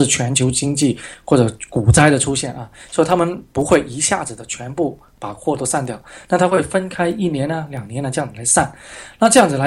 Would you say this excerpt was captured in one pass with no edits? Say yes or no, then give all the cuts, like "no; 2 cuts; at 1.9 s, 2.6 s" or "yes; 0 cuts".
yes; 0 cuts